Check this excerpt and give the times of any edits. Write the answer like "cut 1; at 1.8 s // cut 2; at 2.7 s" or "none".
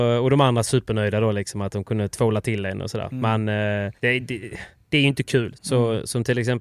cut 1; at 4.0 s // cut 2; at 5.5 s